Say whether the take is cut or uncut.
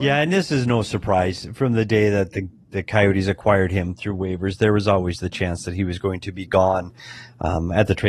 uncut